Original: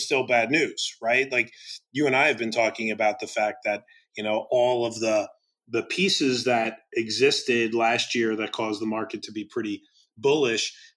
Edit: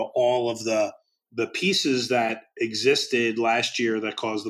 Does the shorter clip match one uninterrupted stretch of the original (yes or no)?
yes